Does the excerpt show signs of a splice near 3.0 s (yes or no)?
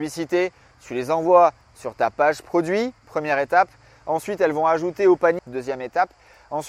yes